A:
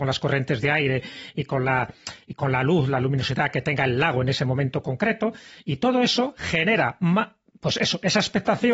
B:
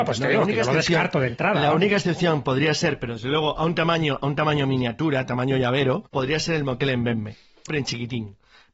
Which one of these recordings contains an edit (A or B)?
B